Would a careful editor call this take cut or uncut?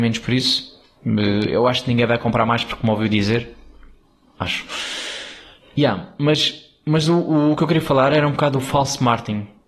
uncut